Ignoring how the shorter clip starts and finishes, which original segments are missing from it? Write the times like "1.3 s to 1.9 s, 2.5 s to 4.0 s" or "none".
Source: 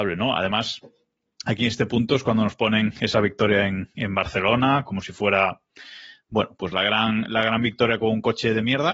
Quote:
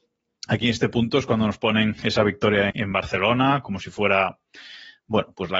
3.7 s to 3.9 s